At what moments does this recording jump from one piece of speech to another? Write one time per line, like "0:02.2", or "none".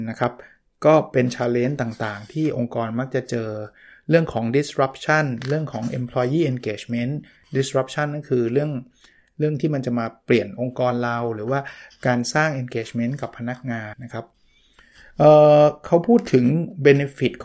0:13.9

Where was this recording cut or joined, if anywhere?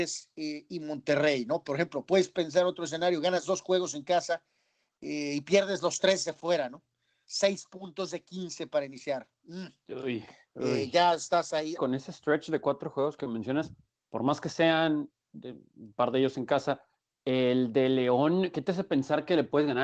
0:11.8

